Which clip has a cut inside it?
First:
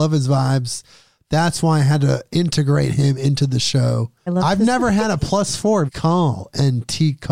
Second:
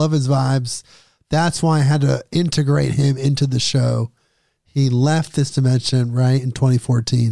first; 2 cuts; at 4.3 s, 5.9 s

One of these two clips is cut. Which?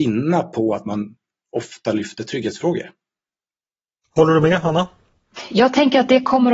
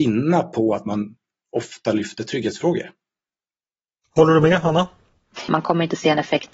second; 1 cut; at 5.5 s

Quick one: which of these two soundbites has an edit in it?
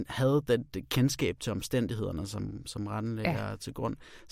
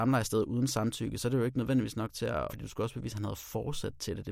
second; 1 cut; at 2.5 s

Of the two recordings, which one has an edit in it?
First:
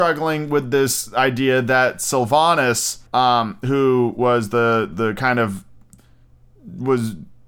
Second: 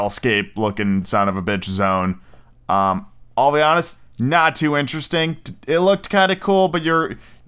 first; 1 cut; at 3.1 s

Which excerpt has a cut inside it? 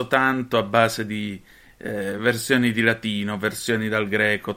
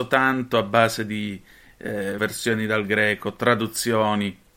second; 1 cut; at 2.2 s

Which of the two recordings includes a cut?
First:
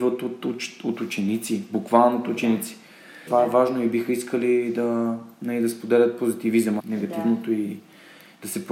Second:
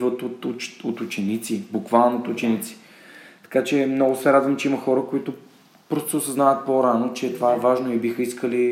first; 2 cuts; at 3.3 s, 6.8 s

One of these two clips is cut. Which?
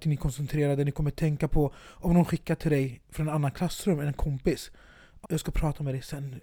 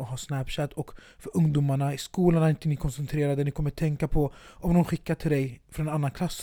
first; 1 cut; at 5.2 s

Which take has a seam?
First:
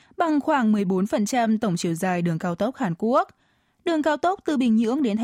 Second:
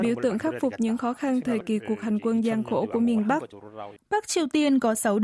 second; 1 cut; at 4.0 s

